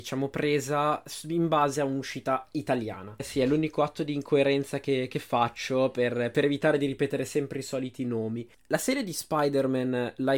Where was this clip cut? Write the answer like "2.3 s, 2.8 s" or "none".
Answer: 3.2 s